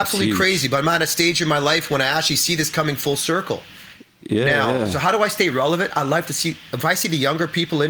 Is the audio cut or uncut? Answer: uncut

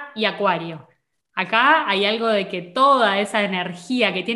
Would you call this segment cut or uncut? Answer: uncut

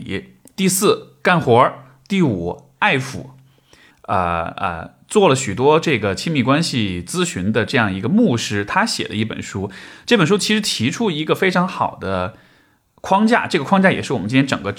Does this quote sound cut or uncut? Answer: cut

